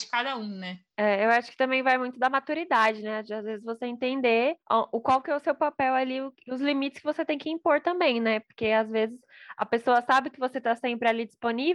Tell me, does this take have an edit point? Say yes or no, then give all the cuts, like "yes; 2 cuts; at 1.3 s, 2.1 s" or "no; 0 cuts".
yes; 1 cut; at 4.6 s